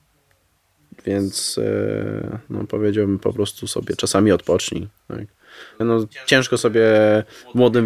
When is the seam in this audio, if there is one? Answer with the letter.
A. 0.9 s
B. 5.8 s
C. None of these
B